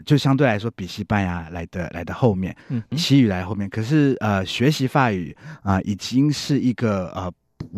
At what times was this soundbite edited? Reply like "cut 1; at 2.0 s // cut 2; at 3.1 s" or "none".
cut 1; at 2.9 s